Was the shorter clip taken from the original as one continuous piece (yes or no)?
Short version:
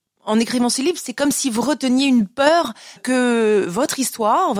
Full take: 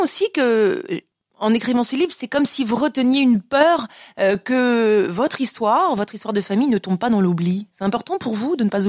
no